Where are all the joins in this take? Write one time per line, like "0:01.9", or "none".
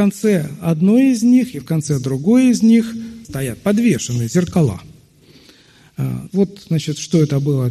0:03.2
0:06.3